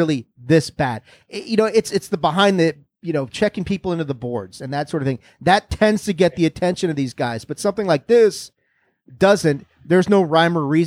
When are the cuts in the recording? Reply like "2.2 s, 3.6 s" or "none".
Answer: none